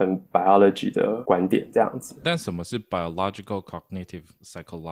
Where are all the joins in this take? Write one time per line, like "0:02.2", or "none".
0:02.2

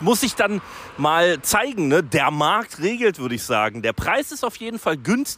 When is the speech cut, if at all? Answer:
none

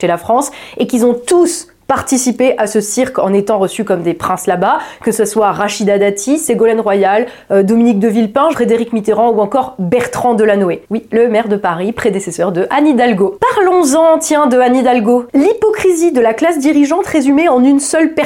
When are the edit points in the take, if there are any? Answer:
none

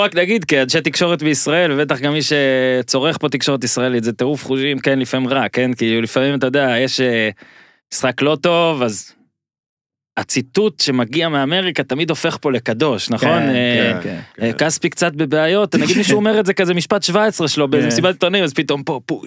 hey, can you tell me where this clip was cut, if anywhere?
none

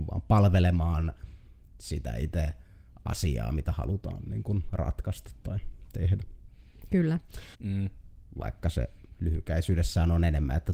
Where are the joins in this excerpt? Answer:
0:07.5

